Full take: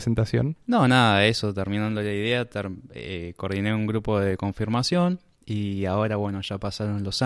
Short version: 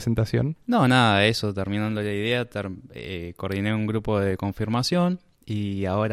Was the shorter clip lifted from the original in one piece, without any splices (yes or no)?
yes